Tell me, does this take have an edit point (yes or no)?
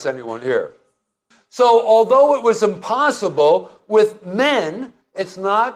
no